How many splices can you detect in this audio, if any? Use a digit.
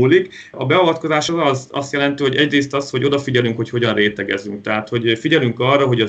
0